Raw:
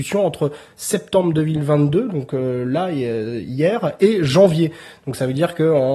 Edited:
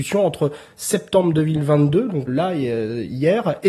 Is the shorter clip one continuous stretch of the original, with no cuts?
no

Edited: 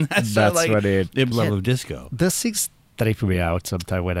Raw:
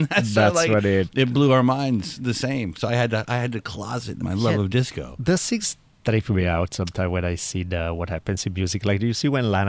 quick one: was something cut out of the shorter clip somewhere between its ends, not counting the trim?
yes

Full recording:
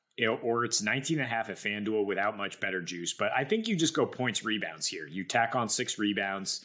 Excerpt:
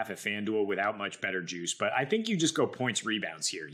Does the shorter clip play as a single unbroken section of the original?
yes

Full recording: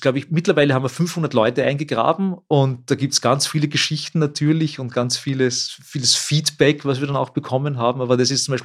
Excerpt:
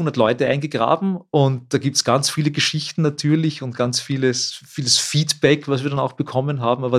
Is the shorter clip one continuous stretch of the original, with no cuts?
yes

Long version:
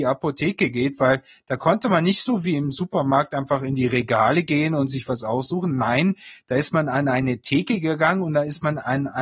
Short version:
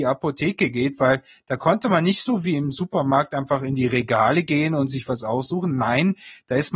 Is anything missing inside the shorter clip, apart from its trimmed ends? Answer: no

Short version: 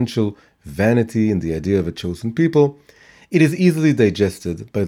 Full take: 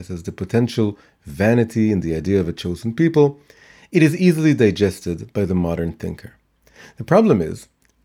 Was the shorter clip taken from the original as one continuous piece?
yes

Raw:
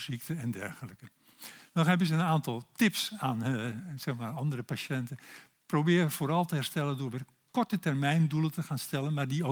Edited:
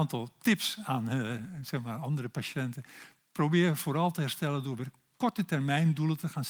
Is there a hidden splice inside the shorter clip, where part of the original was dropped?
no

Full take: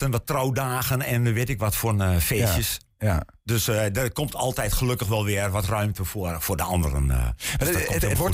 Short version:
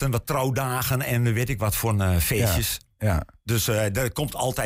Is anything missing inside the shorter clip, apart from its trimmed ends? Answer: no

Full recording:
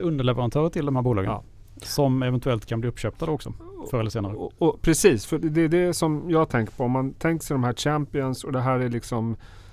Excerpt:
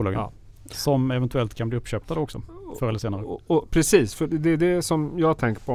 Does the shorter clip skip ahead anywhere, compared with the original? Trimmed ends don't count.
no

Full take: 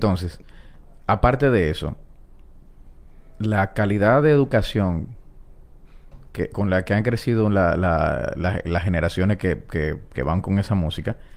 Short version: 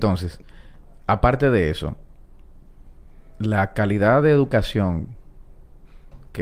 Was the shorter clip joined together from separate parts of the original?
no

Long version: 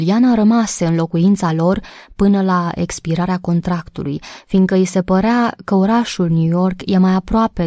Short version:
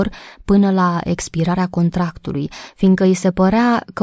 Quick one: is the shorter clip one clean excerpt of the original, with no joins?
yes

